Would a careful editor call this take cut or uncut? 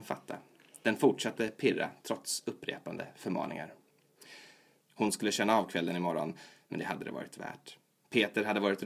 cut